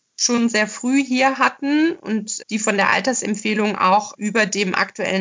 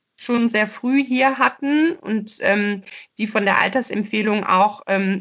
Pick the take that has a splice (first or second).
first